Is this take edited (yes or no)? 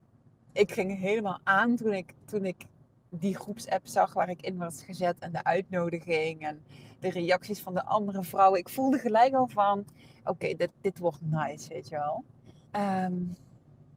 yes